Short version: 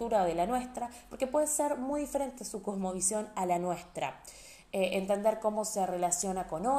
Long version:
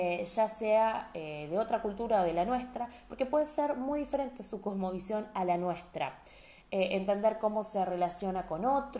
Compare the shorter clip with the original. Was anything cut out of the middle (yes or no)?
no